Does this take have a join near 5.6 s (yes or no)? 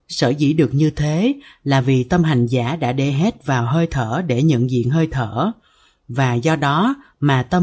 no